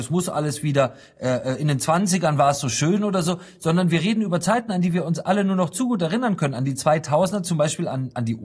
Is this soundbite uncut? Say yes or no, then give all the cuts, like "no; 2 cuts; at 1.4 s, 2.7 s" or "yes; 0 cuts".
yes; 0 cuts